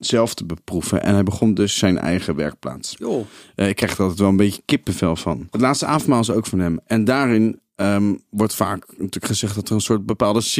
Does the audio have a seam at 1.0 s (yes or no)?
no